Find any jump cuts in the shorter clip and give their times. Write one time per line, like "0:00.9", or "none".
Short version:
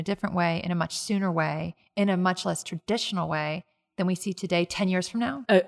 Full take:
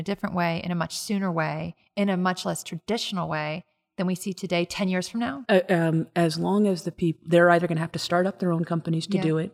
none